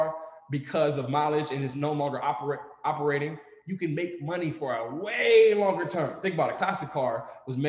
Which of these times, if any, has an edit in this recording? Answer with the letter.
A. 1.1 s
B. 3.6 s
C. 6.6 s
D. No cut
D